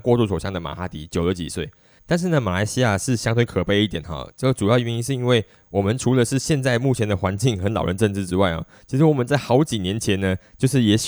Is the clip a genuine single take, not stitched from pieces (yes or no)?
no